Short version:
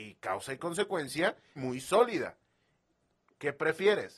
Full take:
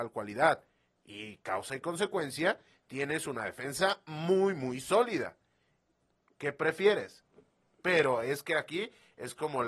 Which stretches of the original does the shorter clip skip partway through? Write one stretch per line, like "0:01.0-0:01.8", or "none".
0:02.8-0:04.5